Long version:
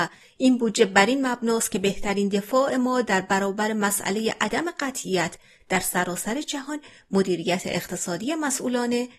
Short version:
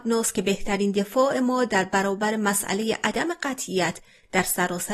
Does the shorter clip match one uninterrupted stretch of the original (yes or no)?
yes